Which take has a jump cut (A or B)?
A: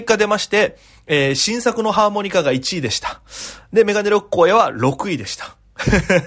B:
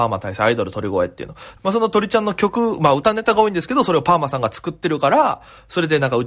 B